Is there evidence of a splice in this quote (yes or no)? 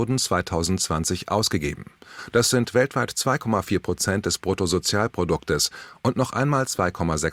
no